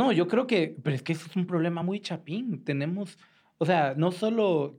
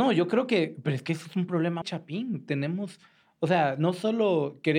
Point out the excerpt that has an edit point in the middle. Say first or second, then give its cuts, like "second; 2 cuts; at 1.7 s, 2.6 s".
second; 1 cut; at 1.8 s